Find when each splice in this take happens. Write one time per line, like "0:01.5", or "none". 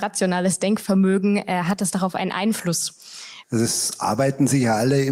0:03.4